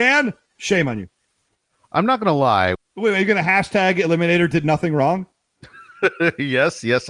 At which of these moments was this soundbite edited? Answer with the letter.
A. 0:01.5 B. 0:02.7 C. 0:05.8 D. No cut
B